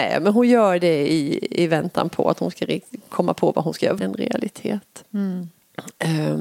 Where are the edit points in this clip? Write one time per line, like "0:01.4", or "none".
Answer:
0:04.0
0:05.0